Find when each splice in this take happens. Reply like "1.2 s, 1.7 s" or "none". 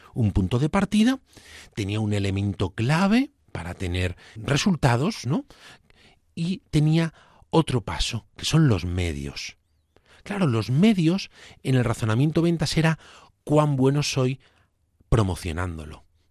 4.4 s